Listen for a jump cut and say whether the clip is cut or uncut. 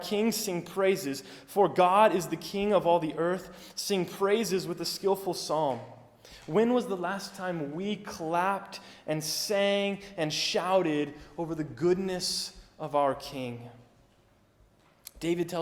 uncut